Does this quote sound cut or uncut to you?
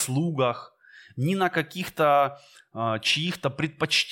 uncut